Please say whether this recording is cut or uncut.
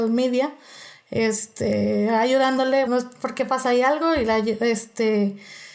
cut